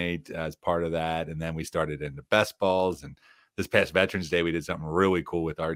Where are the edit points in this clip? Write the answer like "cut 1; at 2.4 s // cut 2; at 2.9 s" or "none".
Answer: none

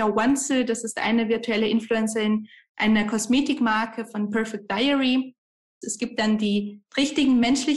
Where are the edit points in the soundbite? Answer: cut 1; at 5.8 s

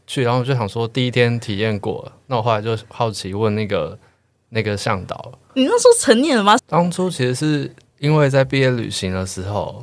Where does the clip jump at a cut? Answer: cut 1; at 5.5 s // cut 2; at 6.6 s

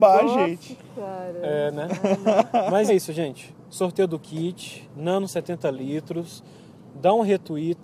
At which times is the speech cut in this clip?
cut 1; at 2.9 s

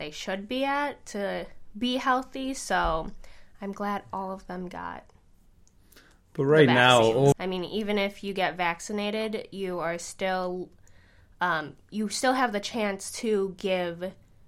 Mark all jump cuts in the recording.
cut 1; at 7.3 s

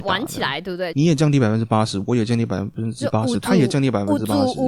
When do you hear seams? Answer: cut 1; at 0.9 s

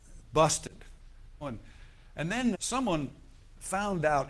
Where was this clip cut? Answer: cut 1; at 1.4 s // cut 2; at 2.5 s

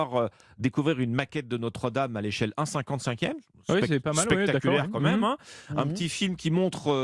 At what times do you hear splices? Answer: none

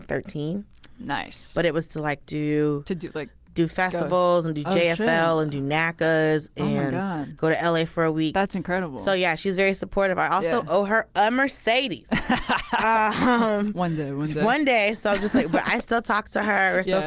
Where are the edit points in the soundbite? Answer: none

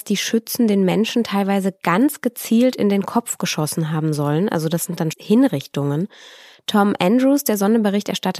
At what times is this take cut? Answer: cut 1; at 5.1 s

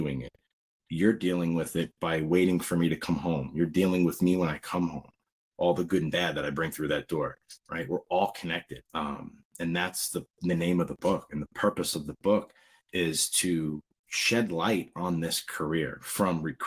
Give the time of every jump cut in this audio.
cut 1; at 8.9 s

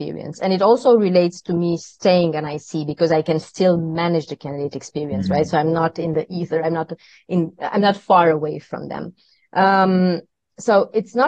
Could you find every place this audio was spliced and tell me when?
none

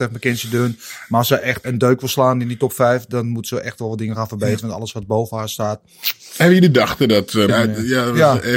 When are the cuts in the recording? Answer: cut 1; at 1.6 s // cut 2; at 7.5 s

